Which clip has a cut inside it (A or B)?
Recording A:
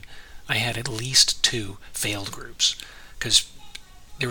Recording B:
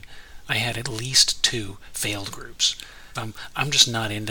B